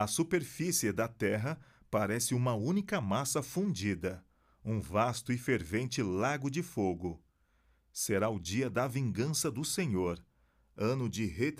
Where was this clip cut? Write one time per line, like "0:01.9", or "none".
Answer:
none